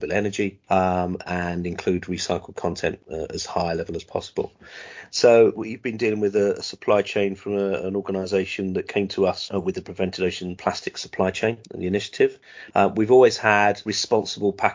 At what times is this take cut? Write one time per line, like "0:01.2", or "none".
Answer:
0:05.5
0:12.7